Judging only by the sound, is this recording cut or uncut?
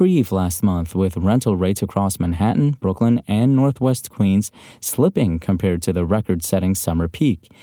uncut